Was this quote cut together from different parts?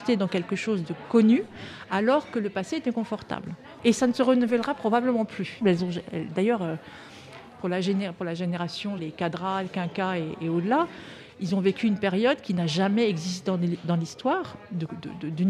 yes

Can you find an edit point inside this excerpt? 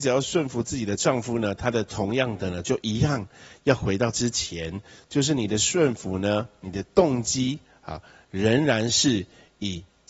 no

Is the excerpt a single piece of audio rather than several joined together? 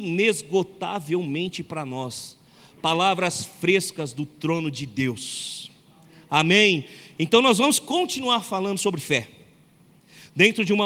yes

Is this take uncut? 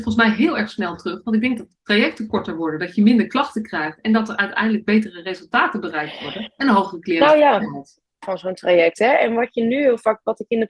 no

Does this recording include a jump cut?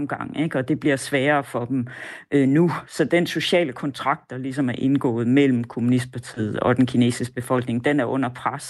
no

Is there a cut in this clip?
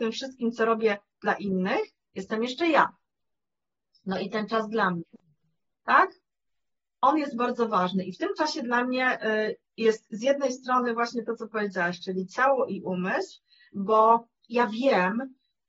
no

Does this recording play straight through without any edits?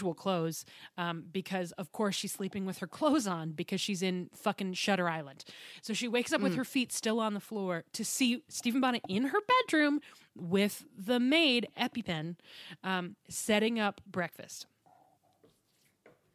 yes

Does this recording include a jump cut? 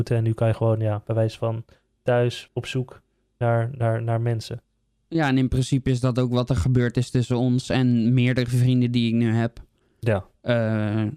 yes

